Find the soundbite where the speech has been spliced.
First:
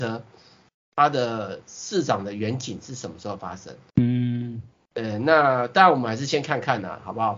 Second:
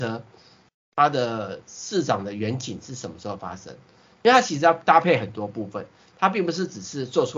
first; 1 cut; at 3.9 s

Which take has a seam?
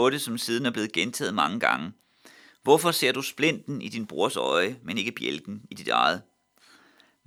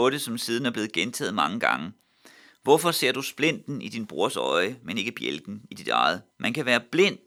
second; 1 cut; at 6.3 s

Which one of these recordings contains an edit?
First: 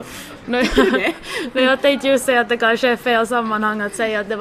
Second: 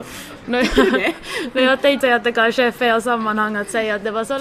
second; 1 cut; at 2.0 s

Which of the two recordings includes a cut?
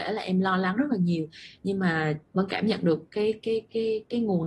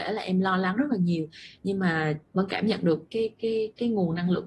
second; 1 cut; at 3.1 s

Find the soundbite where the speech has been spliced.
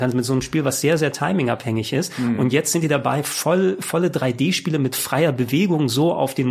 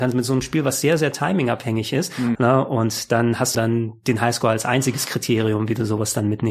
second; 2 cuts; at 2.4 s, 3.5 s

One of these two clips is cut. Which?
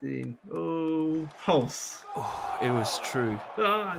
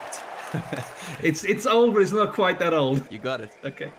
second; 2 cuts; at 1.2 s, 3.0 s

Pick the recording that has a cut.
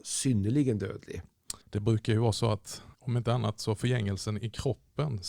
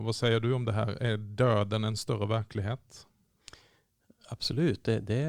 first; 2 cuts; at 1.6 s, 2.9 s

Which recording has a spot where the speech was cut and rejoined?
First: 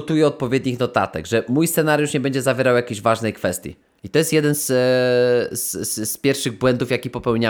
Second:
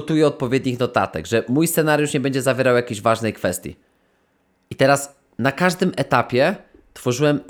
first; 1 cut; at 4.0 s

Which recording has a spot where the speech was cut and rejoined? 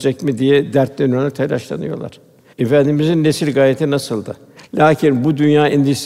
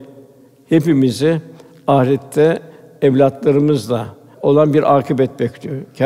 first; 2 cuts; at 2.5 s, 4.6 s

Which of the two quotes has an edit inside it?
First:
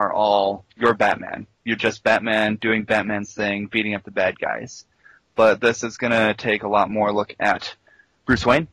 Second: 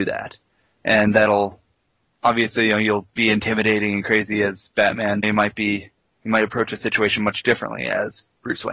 second; 1 cut; at 5.2 s

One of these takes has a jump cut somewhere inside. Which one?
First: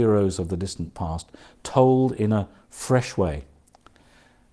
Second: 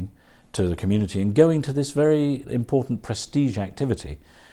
second; 1 cut; at 2.4 s

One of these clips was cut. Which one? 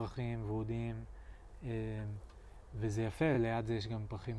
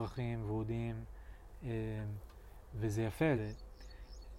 second; 1 cut; at 3.3 s

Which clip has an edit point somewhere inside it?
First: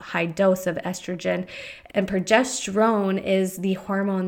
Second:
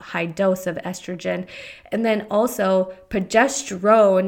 first; 1 cut; at 1.9 s

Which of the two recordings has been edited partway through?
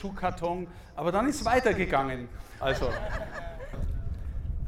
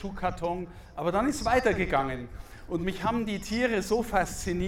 first; 2 cuts; at 2.6 s, 3.7 s

